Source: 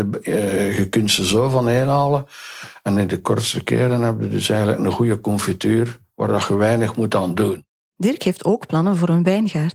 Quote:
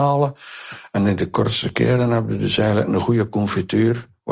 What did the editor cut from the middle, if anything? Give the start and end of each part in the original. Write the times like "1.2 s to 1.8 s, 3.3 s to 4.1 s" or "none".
none